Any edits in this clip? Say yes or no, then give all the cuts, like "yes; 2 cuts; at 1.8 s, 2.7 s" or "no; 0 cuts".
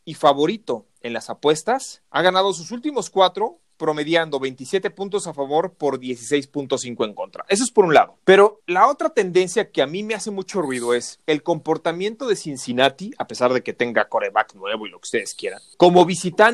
no; 0 cuts